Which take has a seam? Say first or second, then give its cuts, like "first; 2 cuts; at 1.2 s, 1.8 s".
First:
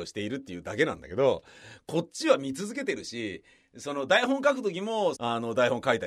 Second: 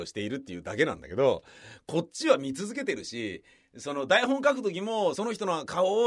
first; 1 cut; at 5.1 s